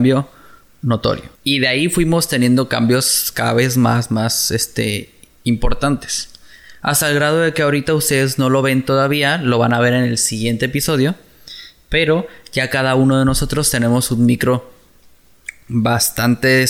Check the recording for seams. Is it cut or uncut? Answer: cut